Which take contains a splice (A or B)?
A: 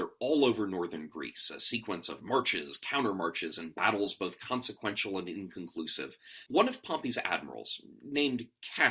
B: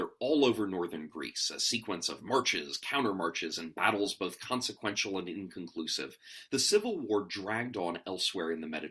A